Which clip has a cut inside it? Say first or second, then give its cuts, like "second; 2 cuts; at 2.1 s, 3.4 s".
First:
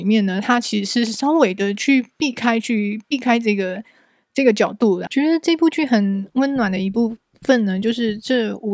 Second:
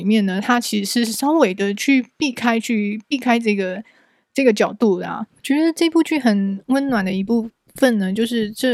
first; 1 cut; at 5.1 s